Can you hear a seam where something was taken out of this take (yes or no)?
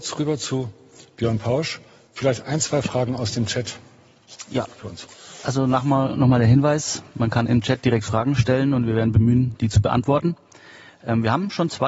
no